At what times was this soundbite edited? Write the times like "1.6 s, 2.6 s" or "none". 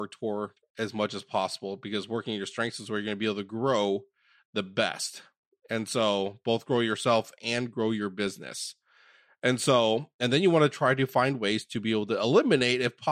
none